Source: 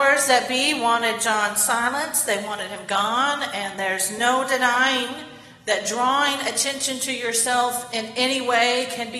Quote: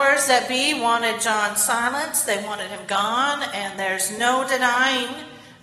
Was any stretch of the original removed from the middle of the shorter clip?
no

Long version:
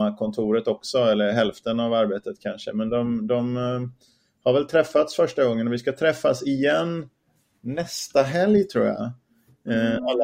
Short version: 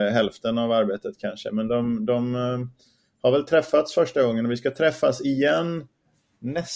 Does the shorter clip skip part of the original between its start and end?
no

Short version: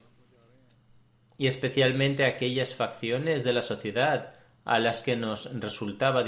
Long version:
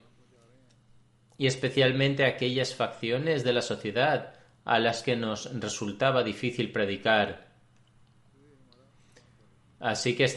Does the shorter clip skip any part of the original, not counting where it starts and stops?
no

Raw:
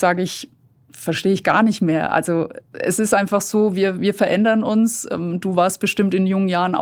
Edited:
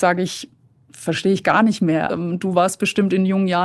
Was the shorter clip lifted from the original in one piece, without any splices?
no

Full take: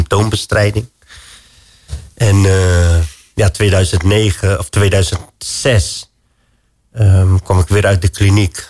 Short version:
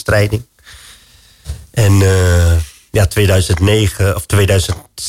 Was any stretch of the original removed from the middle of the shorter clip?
no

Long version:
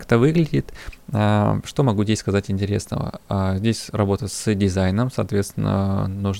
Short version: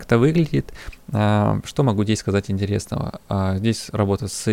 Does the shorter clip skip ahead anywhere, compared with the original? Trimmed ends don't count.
no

